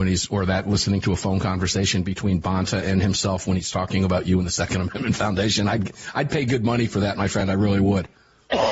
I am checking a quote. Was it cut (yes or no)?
no